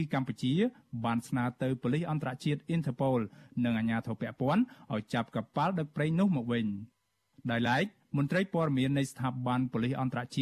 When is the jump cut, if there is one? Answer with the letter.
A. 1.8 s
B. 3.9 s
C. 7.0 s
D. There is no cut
D